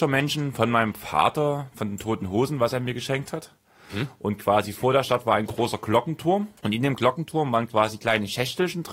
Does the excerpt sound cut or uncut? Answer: cut